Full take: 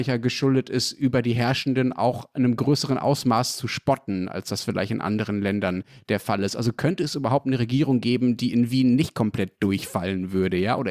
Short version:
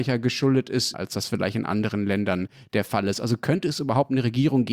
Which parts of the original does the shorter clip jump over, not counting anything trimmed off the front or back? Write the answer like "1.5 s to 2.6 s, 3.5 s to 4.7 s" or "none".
0.9 s to 4.3 s